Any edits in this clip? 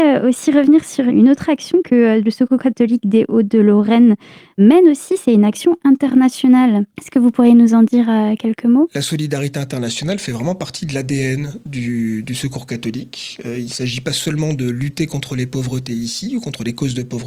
no; 0 cuts

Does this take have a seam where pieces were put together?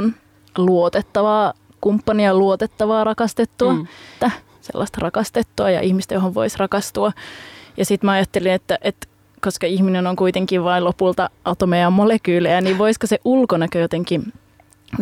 yes; 1 cut; at 4.2 s

